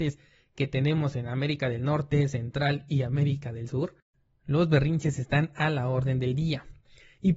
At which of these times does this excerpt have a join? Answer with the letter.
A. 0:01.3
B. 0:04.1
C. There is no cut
C